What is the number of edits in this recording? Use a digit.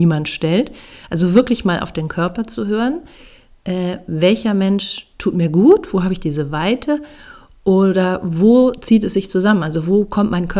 0